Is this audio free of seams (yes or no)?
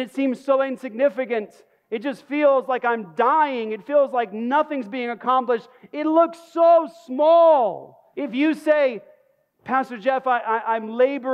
no